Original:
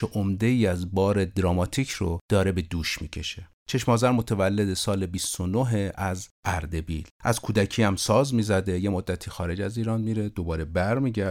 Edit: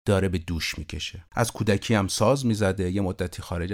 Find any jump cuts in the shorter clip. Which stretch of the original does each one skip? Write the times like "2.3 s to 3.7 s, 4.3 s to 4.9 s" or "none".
3.5 s to 7.2 s